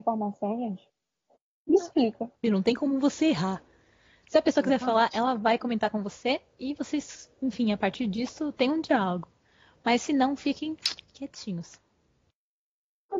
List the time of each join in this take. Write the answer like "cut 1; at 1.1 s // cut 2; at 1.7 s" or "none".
cut 1; at 2.4 s